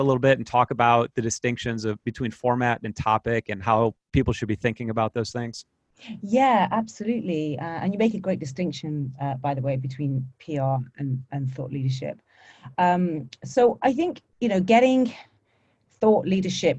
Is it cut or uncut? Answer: cut